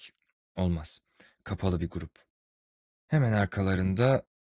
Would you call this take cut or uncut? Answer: uncut